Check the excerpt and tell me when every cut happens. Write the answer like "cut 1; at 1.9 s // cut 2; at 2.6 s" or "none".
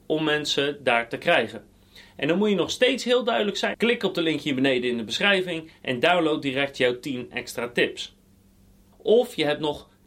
cut 1; at 3.7 s // cut 2; at 8.9 s